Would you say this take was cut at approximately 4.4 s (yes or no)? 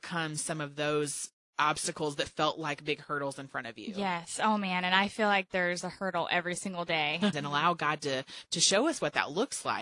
no